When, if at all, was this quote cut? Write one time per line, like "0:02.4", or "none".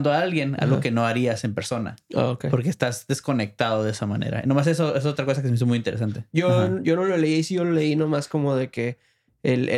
0:06.3